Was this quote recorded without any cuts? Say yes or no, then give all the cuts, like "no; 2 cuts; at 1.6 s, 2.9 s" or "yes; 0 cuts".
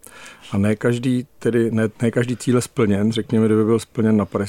yes; 0 cuts